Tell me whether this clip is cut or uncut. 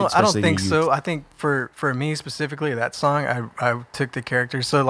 uncut